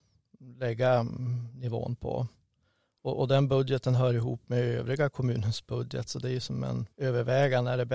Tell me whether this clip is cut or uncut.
cut